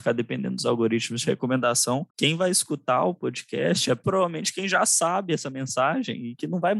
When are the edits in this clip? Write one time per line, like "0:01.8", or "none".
0:02.1
0:04.0